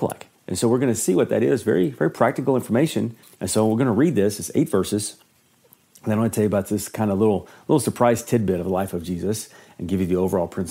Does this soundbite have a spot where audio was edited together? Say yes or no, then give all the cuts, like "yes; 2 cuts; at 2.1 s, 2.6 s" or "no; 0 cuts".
yes; 1 cut; at 3.2 s